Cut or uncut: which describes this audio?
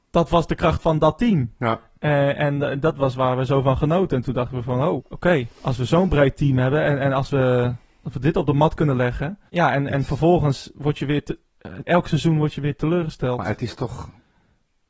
cut